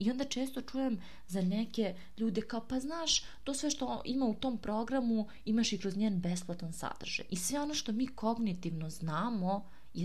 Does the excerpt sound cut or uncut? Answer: cut